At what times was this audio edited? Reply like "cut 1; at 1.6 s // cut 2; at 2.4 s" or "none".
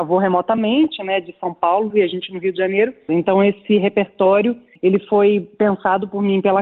cut 1; at 1.9 s // cut 2; at 3.1 s